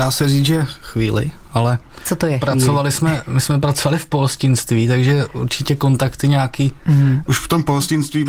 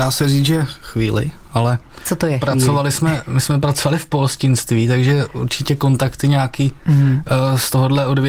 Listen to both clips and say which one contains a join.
first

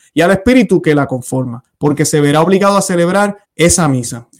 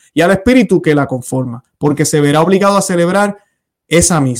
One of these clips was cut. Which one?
first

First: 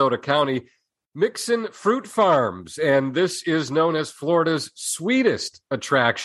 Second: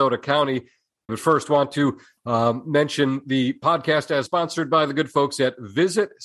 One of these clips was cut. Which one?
second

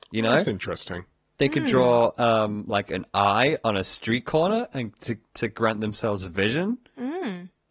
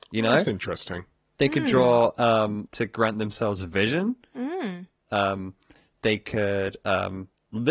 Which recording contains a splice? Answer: second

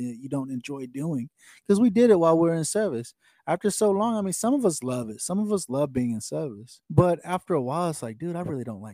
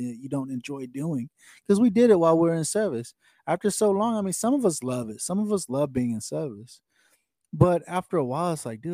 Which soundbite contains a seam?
first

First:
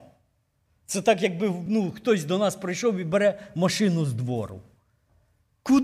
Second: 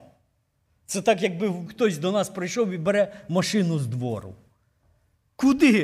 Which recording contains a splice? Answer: second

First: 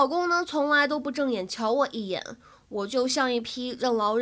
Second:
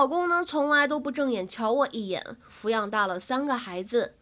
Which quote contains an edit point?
second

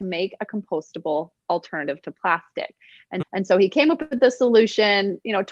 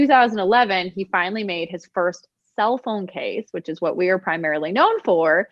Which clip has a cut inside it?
first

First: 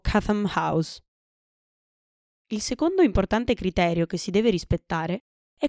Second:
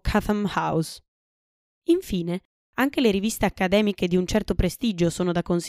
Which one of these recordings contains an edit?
second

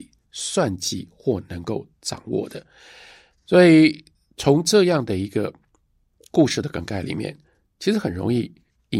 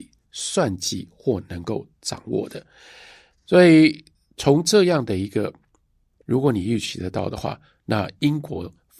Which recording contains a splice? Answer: second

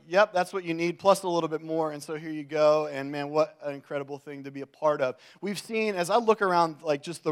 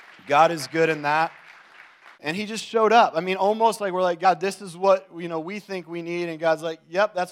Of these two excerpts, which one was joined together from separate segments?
second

